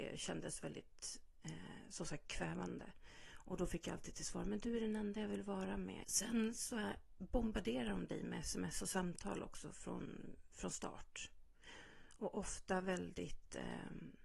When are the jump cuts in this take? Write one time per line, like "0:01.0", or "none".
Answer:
0:06.0